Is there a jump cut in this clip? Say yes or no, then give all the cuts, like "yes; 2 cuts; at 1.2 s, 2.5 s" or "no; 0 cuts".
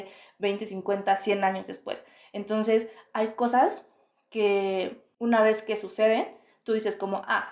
no; 0 cuts